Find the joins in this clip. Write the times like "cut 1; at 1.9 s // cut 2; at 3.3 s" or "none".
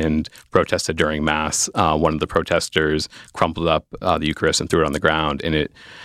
none

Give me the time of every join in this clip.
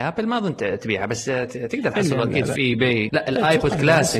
cut 1; at 3.1 s

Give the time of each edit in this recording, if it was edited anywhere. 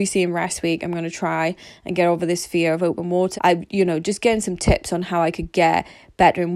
cut 1; at 3.3 s

